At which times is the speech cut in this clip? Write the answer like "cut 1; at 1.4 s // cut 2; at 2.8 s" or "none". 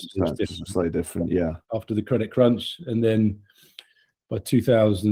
cut 1; at 1.7 s